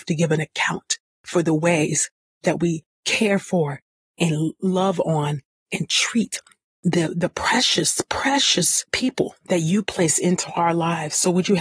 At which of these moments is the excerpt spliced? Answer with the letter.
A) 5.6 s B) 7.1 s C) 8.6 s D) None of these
D